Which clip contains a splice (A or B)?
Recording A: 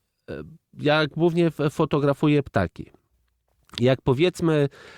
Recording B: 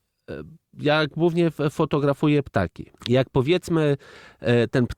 B